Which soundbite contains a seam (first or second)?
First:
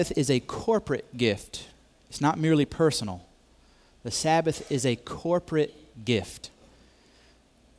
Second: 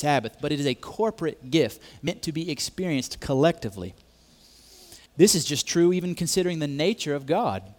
second